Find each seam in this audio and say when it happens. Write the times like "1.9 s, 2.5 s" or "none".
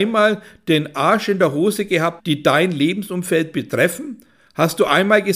2.2 s